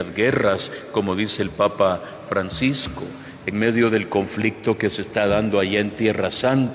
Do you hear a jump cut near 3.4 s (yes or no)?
no